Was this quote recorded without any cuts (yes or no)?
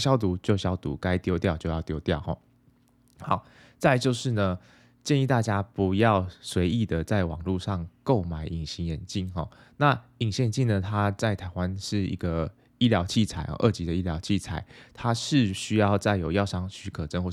yes